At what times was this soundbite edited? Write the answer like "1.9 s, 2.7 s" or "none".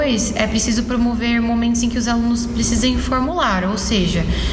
none